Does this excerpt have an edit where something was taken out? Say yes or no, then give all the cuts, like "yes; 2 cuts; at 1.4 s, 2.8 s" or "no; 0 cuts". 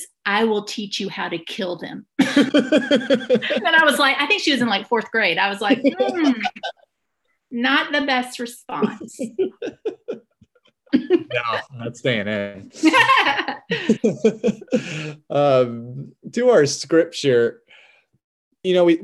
yes; 1 cut; at 10.9 s